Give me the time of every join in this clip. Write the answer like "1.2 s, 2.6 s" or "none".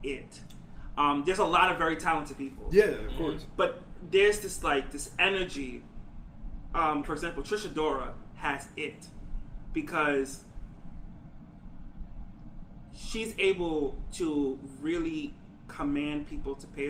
7.0 s